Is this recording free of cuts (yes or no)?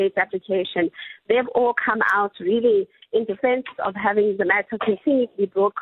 yes